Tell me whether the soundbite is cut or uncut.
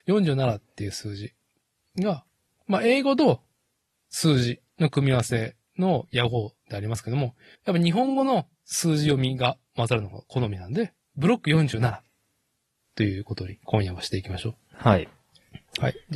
cut